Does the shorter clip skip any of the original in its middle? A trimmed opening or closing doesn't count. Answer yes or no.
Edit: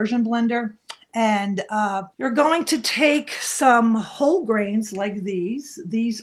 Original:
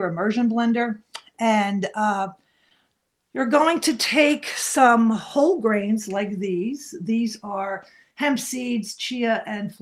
yes